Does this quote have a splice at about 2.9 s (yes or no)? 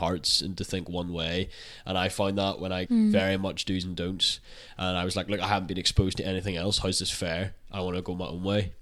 yes